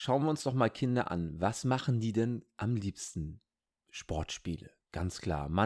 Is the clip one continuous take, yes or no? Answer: yes